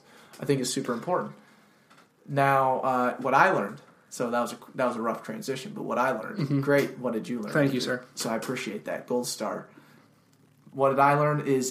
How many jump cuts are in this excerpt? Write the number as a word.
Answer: zero